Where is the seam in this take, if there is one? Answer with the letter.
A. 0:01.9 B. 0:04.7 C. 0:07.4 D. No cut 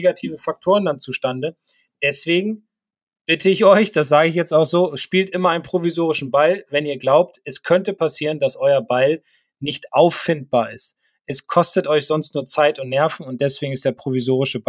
D